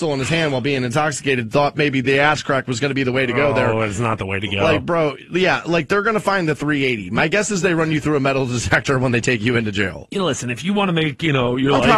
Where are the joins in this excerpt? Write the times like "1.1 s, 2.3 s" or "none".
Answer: none